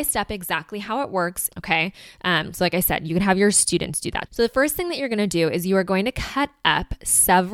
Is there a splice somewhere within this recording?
yes; 2 cuts; at 1.5 s, 4.3 s

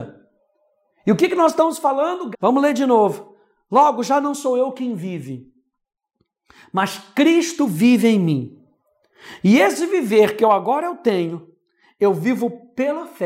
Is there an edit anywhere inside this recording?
yes; 1 cut; at 2.3 s

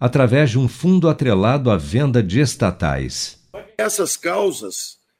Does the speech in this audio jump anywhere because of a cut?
no; 0 cuts

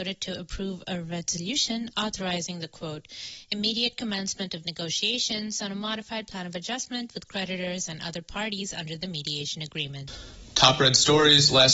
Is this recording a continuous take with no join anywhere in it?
yes; 0 cuts

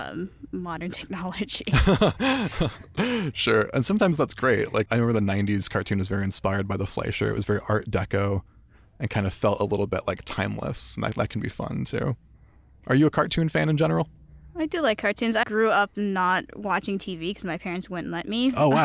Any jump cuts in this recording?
yes; 3 cuts; at 4.9 s, 15.4 s, 16.5 s

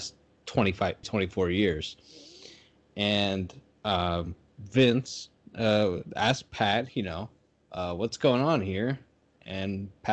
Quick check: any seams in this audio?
yes; 2 cuts; at 1.0 s, 6.9 s

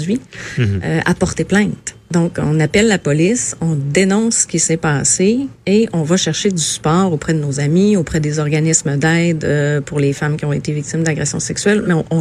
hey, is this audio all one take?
yes; 0 cuts

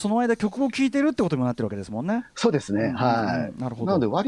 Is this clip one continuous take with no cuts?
yes; 0 cuts

